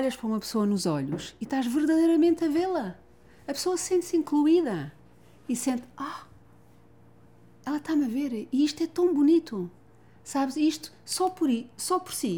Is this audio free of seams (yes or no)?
yes